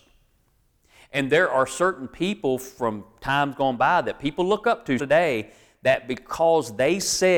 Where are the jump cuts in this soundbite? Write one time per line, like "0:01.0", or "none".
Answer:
0:05.0